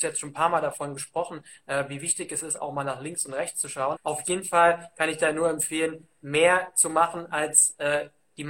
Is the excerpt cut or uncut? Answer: cut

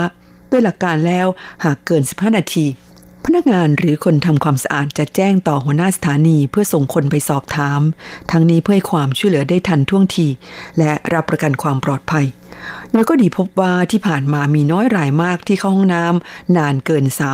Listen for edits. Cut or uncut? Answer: uncut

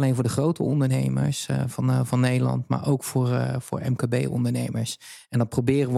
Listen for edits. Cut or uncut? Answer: uncut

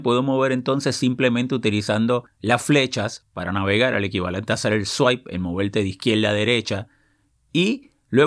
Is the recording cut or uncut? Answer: uncut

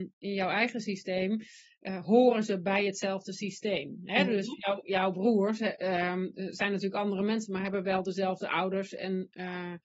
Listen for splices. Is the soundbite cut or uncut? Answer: uncut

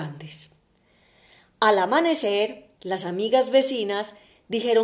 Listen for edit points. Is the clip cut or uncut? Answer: cut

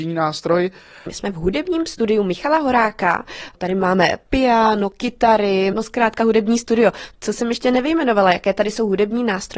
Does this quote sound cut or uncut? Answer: cut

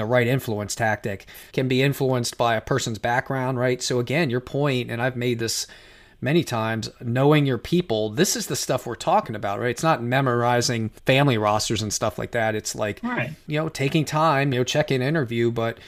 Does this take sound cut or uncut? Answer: cut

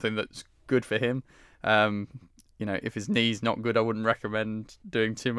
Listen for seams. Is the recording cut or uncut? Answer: uncut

